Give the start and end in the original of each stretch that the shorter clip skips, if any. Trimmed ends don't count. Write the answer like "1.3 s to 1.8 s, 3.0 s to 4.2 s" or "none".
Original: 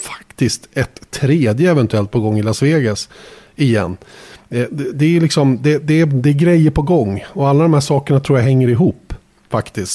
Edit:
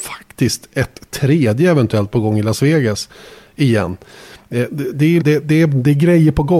5.2 s to 5.6 s